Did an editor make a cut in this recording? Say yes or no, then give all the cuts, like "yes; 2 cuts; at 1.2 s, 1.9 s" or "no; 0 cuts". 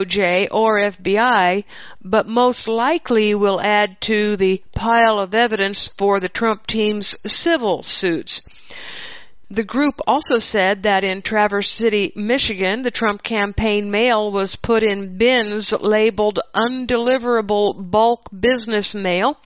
yes; 1 cut; at 9.4 s